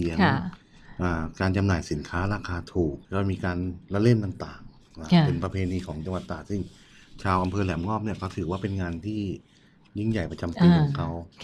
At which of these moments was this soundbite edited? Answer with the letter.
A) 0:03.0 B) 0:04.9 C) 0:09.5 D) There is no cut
A